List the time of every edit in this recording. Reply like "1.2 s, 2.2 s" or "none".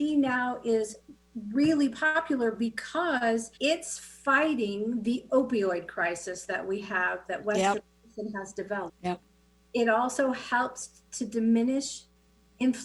3.6 s, 8.9 s